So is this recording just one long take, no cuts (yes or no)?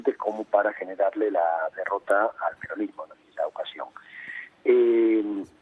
yes